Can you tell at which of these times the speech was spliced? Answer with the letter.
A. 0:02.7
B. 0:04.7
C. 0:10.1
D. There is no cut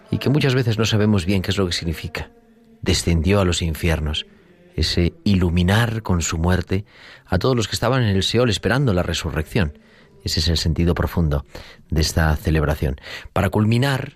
D